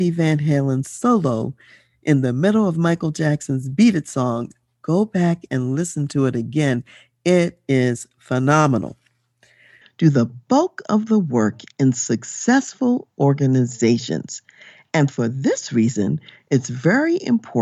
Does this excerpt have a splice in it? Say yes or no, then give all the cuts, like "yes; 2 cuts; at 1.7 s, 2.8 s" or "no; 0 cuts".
yes; 1 cut; at 9.8 s